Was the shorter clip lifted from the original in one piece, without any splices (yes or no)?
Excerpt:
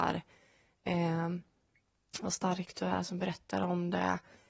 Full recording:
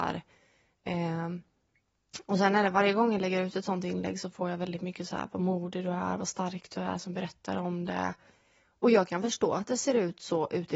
no